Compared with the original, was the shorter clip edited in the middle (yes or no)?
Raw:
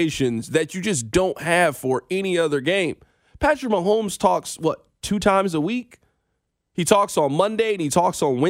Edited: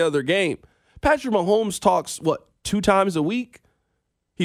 no